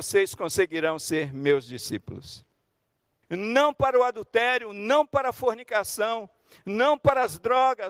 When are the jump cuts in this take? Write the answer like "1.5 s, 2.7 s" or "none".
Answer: 3.2 s